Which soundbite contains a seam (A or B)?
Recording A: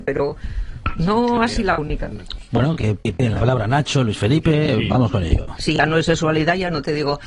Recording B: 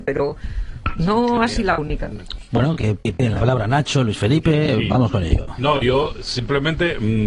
A